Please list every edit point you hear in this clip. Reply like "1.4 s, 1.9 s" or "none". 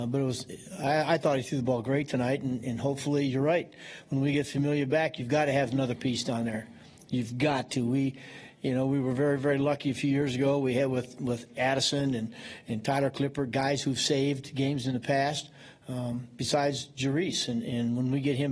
none